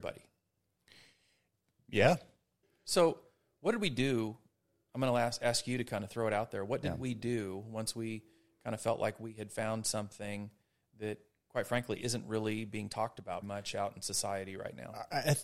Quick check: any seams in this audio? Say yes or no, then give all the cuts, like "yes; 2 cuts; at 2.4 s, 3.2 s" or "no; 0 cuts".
yes; 2 cuts; at 2.6 s, 13.4 s